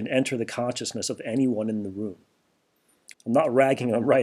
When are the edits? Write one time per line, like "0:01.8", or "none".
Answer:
0:03.1

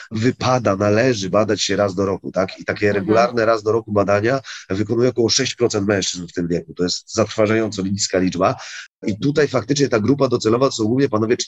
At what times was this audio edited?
0:08.9

